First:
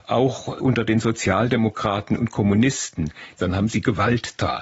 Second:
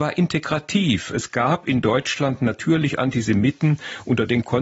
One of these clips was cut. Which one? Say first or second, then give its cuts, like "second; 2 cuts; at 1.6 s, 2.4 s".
first; 1 cut; at 3.4 s